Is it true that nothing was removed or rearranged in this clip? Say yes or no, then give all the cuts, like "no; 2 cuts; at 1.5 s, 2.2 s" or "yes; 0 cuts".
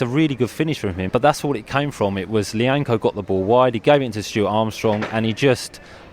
no; 1 cut; at 1.1 s